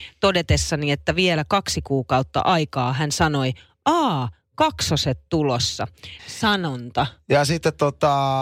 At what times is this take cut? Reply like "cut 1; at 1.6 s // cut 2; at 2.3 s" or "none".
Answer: cut 1; at 6.2 s